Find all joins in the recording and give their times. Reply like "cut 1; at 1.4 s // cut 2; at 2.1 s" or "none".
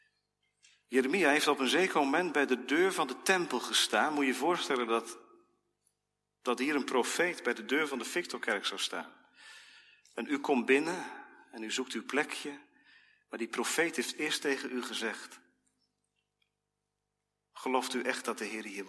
none